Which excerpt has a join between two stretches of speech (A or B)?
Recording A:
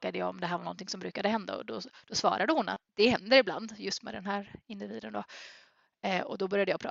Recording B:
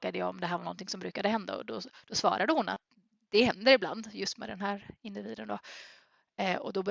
A